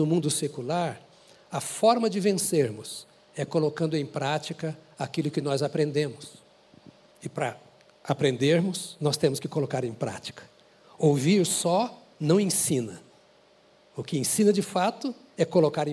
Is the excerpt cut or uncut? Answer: uncut